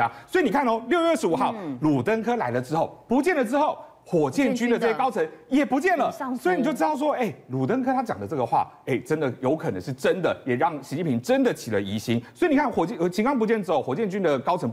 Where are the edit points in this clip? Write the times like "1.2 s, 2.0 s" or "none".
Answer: 3.1 s

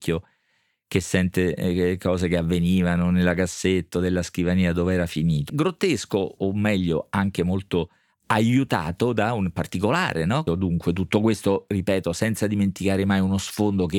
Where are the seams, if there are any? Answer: 5.5 s, 10.5 s

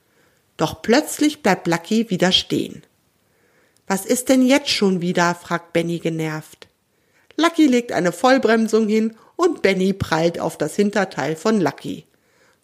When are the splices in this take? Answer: 7.1 s

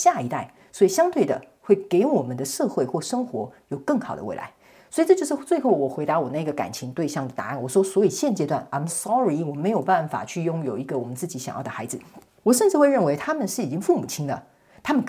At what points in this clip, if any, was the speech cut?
8.9 s, 12.4 s

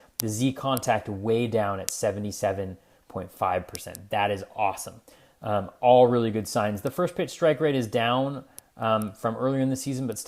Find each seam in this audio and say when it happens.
none

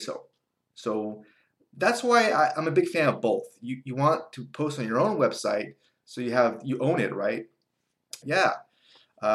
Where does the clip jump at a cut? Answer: 8.2 s

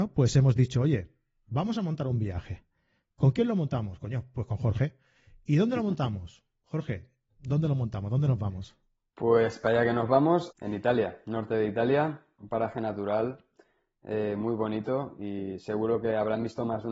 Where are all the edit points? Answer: 10.5 s, 12.4 s

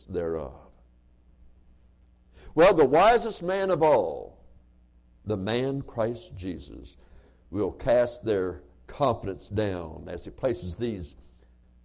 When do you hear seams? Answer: none

